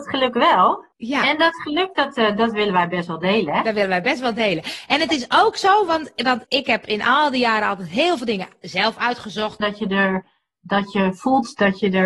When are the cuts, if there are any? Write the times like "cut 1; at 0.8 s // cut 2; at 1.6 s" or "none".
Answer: cut 1; at 0.9 s // cut 2; at 6.4 s // cut 3; at 9.6 s